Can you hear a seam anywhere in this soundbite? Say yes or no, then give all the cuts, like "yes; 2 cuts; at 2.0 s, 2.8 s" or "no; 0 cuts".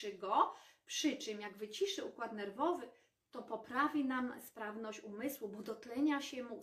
no; 0 cuts